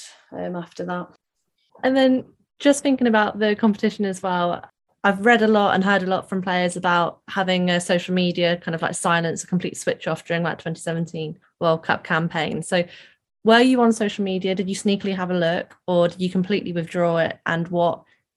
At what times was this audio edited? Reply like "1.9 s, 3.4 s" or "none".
none